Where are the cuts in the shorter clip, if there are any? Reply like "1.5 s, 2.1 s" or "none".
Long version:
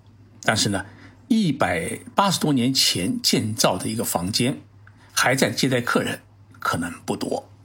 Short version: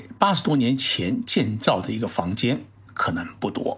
2.9 s